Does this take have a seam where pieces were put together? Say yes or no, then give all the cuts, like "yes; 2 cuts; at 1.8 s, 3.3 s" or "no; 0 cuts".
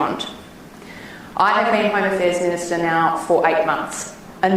no; 0 cuts